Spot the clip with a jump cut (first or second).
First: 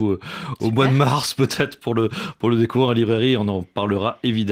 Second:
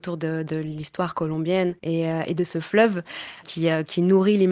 second